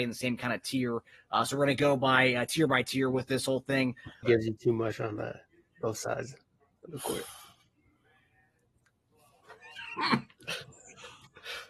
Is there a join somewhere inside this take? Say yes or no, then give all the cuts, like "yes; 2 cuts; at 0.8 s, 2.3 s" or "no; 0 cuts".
yes; 1 cut; at 4.2 s